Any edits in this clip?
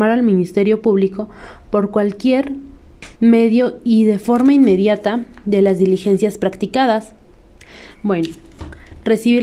yes; 2 cuts; at 3.1 s, 7.9 s

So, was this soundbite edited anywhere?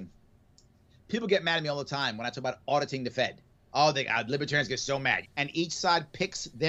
yes; 1 cut; at 5.2 s

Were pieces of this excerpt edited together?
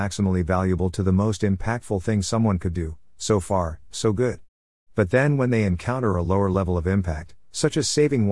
no; 0 cuts

